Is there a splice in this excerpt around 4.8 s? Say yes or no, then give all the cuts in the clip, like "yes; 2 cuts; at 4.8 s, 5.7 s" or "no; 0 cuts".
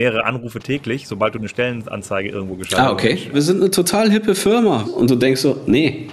yes; 2 cuts; at 3.3 s, 4.8 s